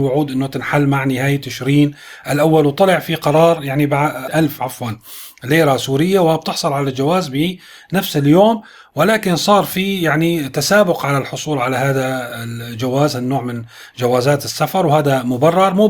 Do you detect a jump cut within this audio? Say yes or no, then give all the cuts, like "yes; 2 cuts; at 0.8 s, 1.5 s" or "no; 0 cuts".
yes; 1 cut; at 4.3 s